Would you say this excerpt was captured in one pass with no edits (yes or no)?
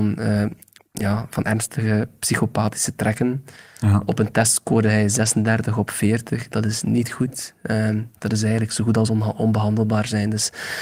yes